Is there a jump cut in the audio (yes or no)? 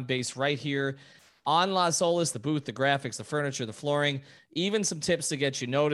yes